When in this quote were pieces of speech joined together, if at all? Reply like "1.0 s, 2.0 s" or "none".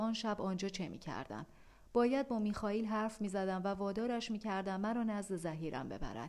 none